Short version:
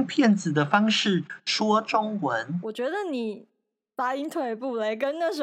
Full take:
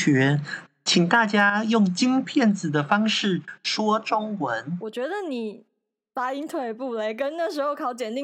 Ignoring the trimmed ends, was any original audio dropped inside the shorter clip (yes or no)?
no